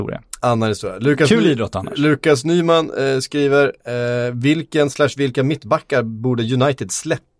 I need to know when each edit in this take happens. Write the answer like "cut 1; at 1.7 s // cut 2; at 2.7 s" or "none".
none